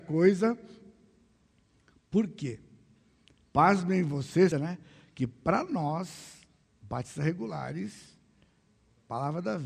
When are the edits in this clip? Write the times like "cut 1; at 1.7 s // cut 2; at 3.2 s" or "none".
cut 1; at 4.5 s // cut 2; at 6.6 s

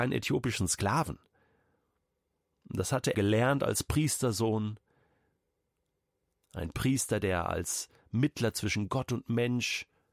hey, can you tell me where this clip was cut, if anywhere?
cut 1; at 3.1 s

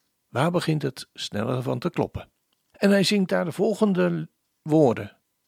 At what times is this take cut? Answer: cut 1; at 2.7 s

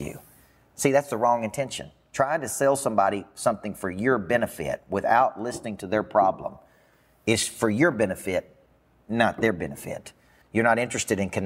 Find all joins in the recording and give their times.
cut 1; at 10.4 s

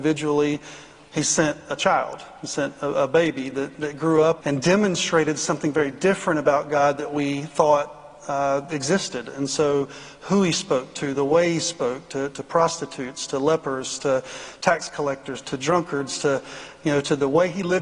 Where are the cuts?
cut 1; at 4.4 s // cut 2; at 15.4 s

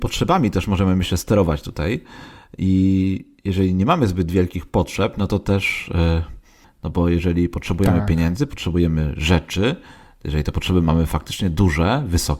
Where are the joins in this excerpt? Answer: cut 1; at 6.6 s

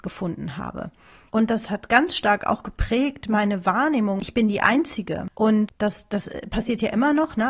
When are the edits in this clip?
cut 1; at 1.3 s // cut 2; at 4.2 s

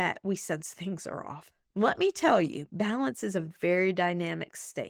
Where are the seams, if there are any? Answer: cut 1; at 1.7 s

